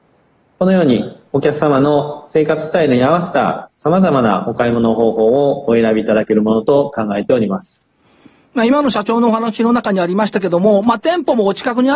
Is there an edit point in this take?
no; 0 cuts

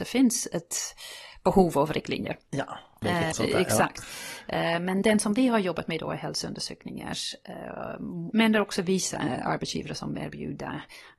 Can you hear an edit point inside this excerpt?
yes; 2 cuts; at 3.3 s, 8.3 s

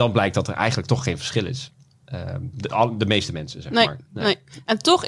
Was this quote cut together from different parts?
yes; 1 cut; at 2.5 s

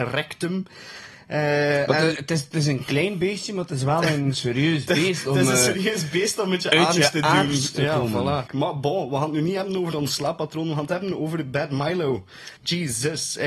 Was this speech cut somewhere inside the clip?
yes; 2 cuts; at 8.5 s, 12.6 s

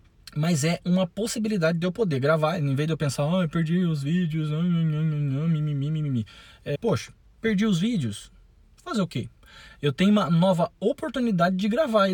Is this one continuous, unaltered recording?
no; 1 cut; at 6.8 s

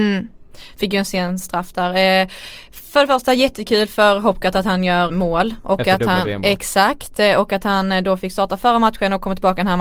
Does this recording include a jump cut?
yes; 1 cut; at 5.1 s

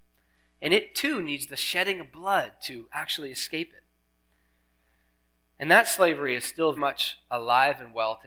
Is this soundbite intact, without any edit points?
no; 1 cut; at 6.8 s

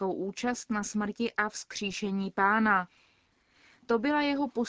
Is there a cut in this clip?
no; 0 cuts

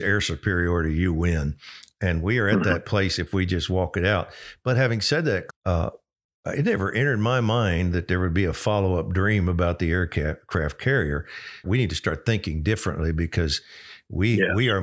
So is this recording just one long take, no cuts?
no; 2 cuts; at 5.5 s, 11.6 s

